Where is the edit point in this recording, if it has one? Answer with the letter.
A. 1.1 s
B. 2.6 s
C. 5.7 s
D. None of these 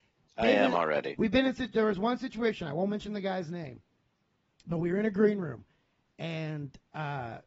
A